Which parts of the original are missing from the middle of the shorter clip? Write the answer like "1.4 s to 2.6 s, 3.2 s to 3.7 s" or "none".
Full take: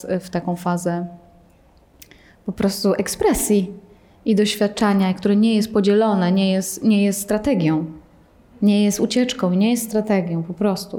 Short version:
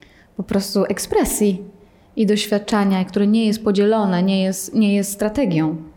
none